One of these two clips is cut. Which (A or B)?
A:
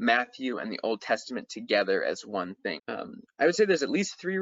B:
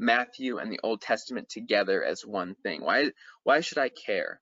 A